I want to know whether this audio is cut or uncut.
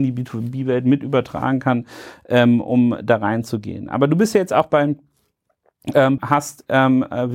cut